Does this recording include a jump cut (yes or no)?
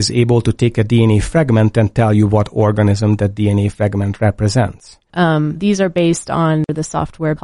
yes